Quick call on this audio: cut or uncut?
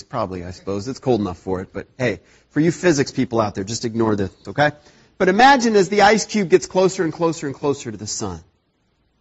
cut